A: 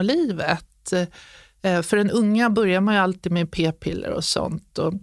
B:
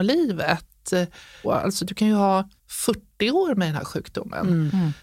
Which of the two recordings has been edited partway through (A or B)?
B